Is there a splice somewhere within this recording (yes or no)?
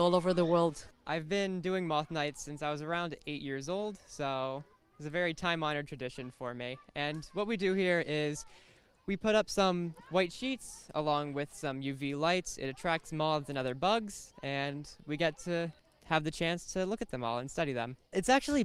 no